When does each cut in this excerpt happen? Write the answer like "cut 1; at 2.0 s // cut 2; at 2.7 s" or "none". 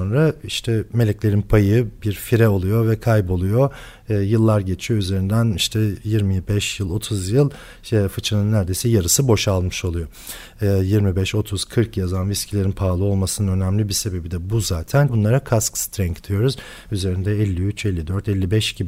cut 1; at 15.1 s